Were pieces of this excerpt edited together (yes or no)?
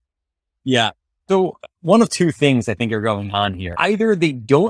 no